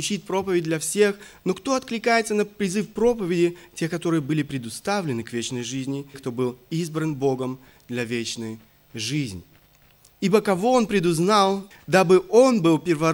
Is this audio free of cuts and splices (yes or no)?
no